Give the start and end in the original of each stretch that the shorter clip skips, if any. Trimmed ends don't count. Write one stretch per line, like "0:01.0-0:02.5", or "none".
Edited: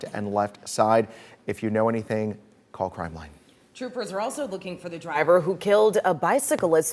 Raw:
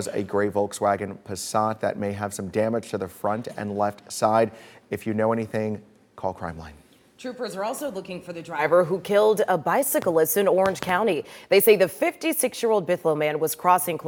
none

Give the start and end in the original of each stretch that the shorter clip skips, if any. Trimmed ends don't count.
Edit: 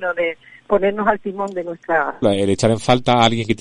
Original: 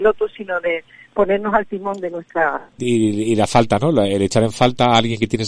0:02.7-0:03.9

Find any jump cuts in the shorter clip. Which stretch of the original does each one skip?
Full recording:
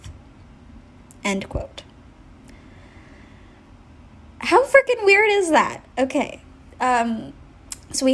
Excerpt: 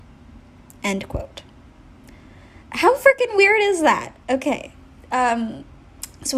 0:03.0-0:04.3

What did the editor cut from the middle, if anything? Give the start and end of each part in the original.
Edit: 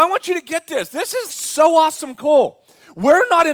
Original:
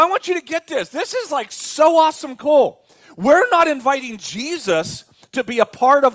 0:01.3-0:01.5

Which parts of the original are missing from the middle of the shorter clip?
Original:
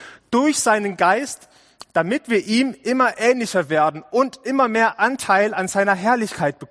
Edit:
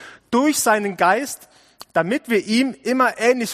none

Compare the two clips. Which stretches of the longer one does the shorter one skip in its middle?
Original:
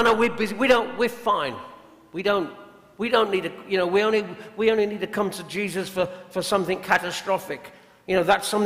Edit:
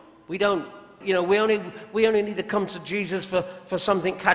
0:02.9-0:03.6

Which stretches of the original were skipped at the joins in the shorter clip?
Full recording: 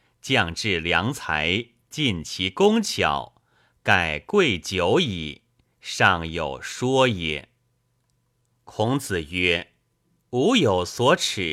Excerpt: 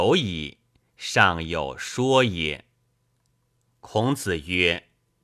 none

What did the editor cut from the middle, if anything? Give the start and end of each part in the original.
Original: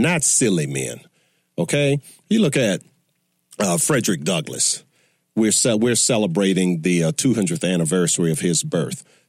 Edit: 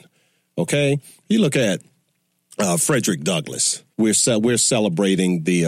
0:04.9-0:05.3

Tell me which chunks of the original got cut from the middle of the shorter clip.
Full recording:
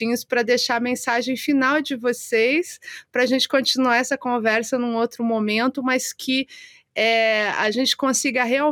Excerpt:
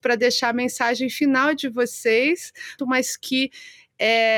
0:03.1-0:05.8

